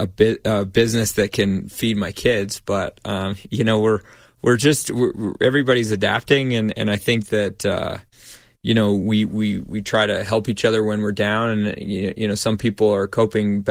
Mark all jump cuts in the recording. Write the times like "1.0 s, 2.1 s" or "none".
none